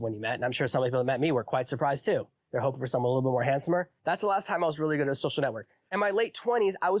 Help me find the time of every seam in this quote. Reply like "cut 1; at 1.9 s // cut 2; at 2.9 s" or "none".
cut 1; at 4.0 s